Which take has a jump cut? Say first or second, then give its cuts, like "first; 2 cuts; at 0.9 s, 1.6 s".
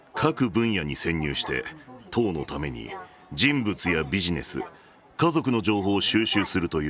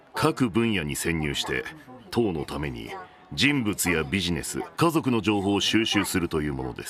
second; 1 cut; at 4.7 s